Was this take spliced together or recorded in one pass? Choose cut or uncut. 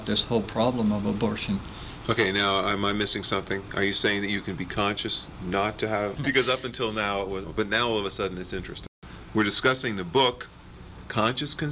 cut